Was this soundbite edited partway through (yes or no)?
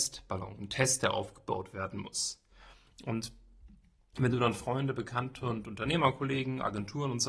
no